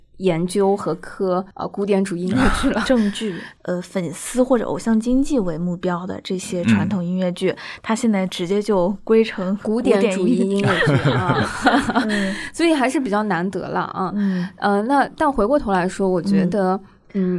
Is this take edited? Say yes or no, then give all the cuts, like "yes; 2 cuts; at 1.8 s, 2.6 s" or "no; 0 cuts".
yes; 2 cuts; at 1.5 s, 3.6 s